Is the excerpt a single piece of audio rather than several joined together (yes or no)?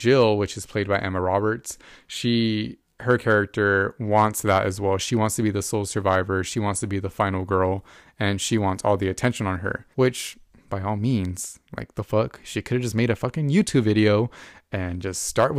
no